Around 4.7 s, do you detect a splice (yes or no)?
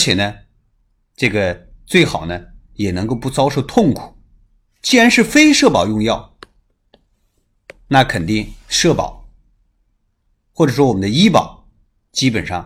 yes